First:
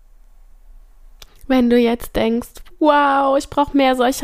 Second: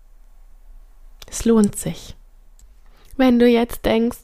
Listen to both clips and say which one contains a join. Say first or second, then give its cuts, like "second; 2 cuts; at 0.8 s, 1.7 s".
first; 1 cut; at 1.3 s